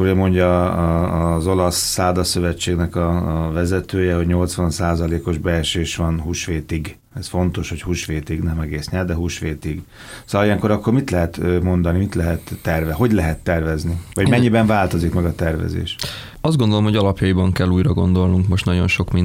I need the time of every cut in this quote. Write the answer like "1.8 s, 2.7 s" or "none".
none

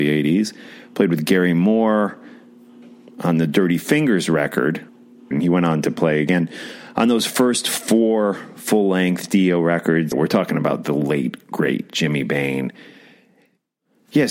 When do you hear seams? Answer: 5.3 s, 10.1 s

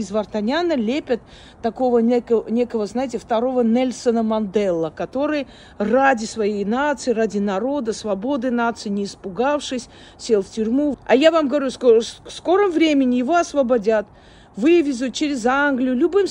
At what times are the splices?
10.9 s

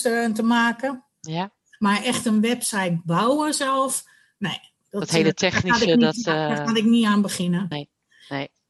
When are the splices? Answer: 7.7 s

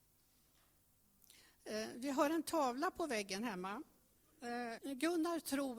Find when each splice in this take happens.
4.8 s

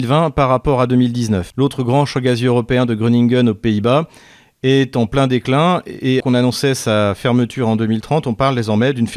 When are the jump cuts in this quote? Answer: 1.5 s, 6.2 s

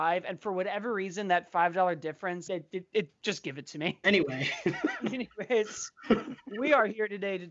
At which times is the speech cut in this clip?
2.5 s, 4.0 s

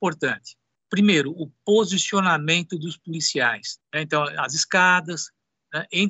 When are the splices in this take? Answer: 3.8 s

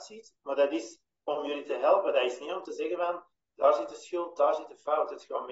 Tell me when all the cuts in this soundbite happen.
none

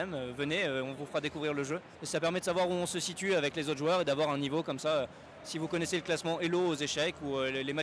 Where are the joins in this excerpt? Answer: 2.0 s

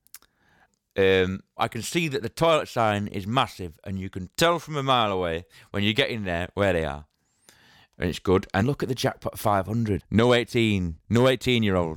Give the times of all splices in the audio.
1.6 s, 8.6 s, 10.0 s

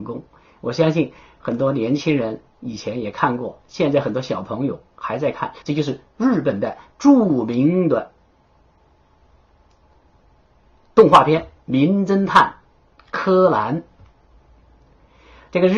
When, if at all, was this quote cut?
5.6 s

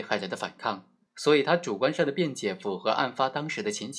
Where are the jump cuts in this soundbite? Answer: 1.1 s

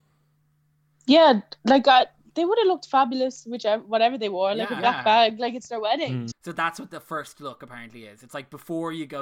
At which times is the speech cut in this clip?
6.3 s

